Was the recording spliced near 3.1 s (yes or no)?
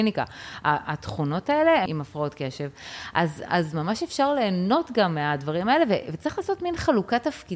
no